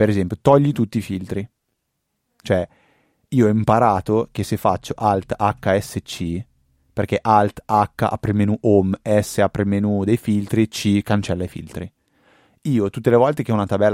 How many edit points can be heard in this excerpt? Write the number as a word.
zero